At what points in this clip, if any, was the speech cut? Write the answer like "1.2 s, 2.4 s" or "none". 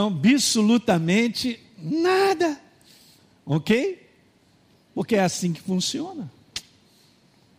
none